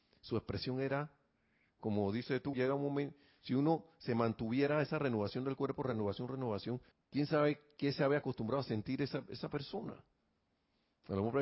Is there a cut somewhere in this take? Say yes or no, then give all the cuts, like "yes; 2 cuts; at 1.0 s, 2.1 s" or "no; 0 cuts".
yes; 2 cuts; at 2.5 s, 6.9 s